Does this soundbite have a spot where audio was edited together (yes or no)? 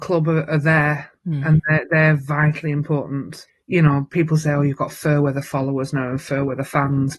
no